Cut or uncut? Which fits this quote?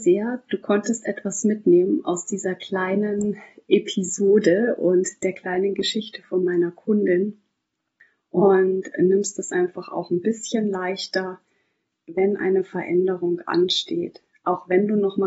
uncut